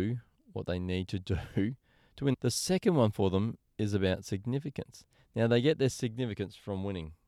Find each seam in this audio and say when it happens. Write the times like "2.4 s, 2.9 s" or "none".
2.3 s